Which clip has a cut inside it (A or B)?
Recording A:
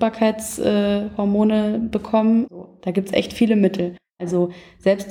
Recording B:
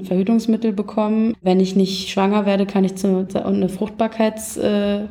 B